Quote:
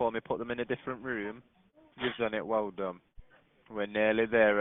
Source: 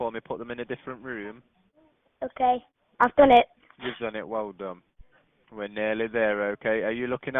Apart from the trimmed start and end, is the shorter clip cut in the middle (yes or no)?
yes